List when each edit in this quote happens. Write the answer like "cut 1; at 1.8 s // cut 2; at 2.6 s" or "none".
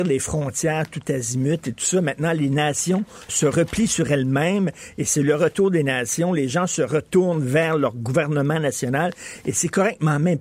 cut 1; at 3.3 s

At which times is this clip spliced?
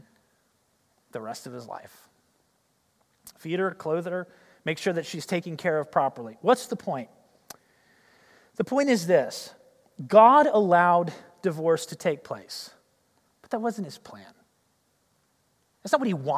none

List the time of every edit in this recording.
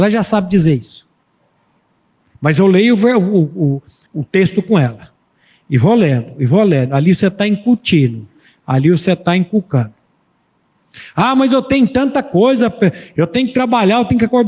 cut 1; at 4.1 s

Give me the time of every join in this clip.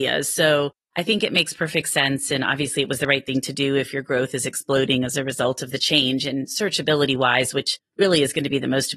none

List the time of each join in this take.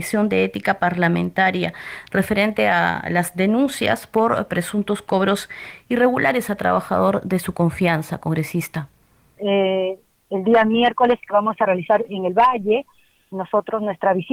cut 1; at 9.4 s

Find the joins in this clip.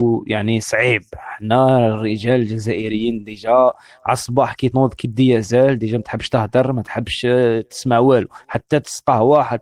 cut 1; at 4.7 s

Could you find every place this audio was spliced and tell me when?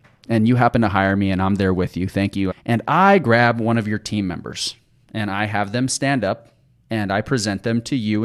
cut 1; at 2.5 s

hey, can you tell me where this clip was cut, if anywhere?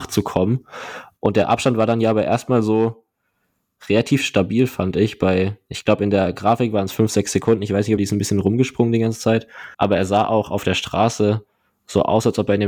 cut 1; at 8.0 s // cut 2; at 9.7 s

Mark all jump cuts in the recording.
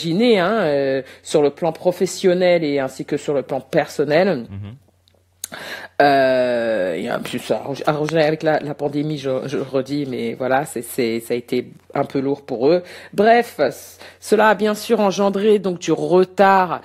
none

